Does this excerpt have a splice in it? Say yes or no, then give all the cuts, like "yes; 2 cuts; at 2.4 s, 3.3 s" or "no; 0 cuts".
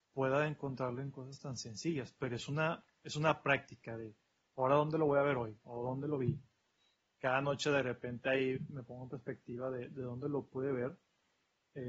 no; 0 cuts